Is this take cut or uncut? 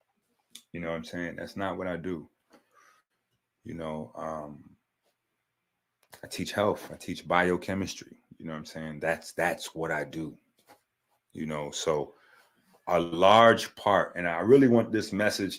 uncut